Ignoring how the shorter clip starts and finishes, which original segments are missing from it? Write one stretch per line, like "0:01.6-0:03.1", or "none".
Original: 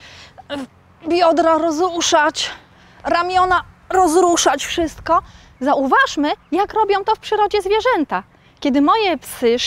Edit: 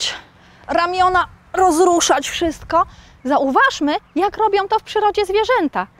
none